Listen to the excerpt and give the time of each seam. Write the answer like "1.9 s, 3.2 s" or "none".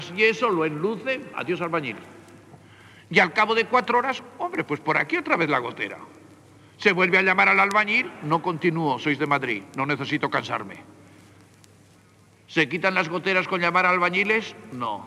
1.3 s

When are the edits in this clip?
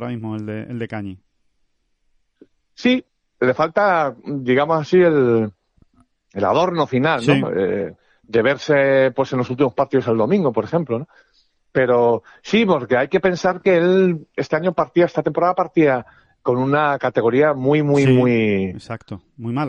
none

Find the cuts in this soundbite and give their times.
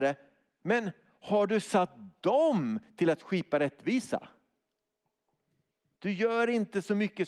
6.0 s

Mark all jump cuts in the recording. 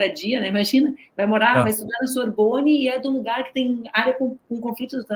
none

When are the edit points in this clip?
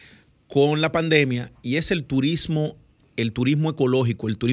none

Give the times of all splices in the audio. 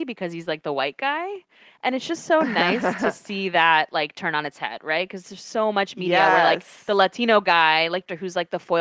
none

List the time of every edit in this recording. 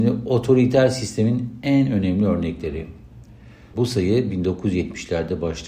3.7 s

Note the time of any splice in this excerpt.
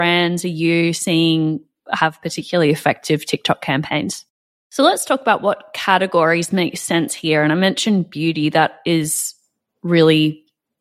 4.5 s

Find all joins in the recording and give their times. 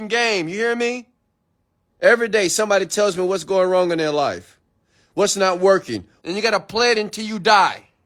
1.9 s, 6.2 s

